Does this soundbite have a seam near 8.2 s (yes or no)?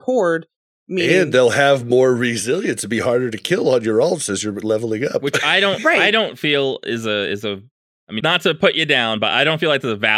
yes